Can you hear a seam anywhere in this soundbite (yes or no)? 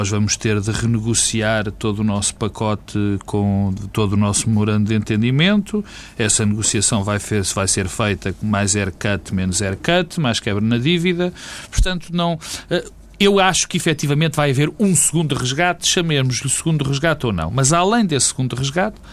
no